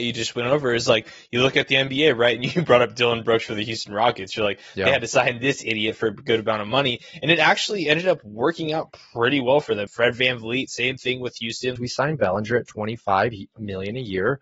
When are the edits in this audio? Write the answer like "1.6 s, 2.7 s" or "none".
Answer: 9.9 s, 11.8 s